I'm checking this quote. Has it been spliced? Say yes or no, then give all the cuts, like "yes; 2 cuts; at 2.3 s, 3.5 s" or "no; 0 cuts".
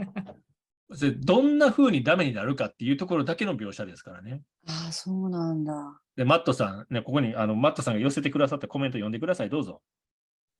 no; 0 cuts